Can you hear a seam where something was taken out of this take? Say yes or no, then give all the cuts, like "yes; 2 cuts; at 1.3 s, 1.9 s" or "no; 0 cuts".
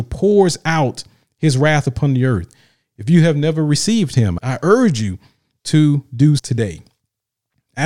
yes; 2 cuts; at 4.4 s, 6.4 s